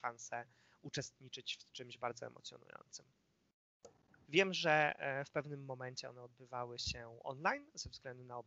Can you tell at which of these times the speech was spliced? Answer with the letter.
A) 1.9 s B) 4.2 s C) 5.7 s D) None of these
B